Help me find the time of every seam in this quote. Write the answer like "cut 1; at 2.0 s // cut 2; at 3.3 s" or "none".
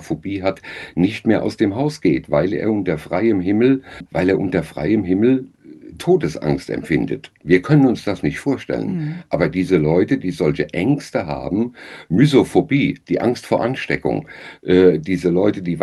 cut 1; at 4.1 s